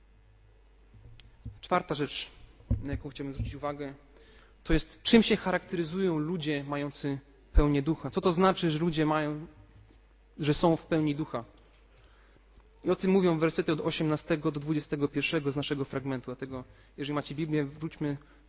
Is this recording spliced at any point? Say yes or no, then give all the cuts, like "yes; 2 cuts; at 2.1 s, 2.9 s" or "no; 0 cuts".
no; 0 cuts